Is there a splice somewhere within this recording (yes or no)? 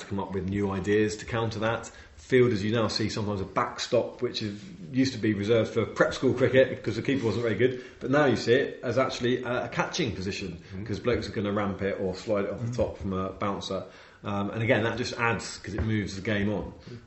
no